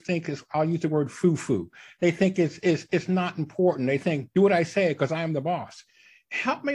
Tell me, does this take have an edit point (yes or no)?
no